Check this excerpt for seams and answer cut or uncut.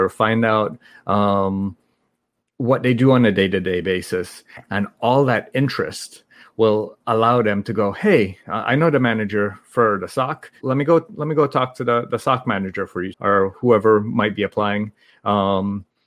cut